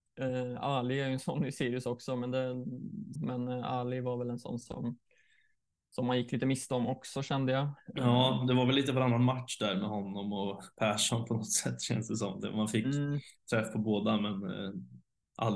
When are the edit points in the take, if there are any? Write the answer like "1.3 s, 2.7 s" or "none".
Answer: 3.2 s